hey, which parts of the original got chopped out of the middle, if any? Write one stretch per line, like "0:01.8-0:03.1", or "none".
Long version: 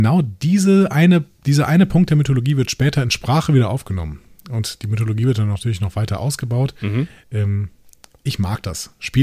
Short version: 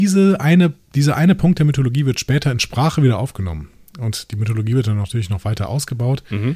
none